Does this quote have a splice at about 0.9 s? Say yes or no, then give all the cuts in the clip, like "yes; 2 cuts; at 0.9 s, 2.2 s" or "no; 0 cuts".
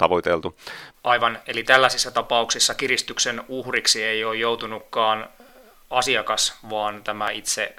yes; 1 cut; at 0.9 s